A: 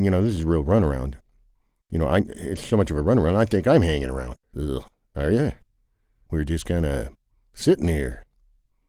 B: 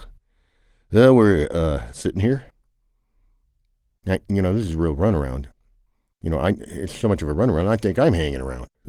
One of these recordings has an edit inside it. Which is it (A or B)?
A